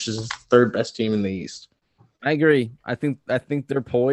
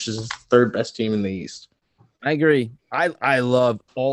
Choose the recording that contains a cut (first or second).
second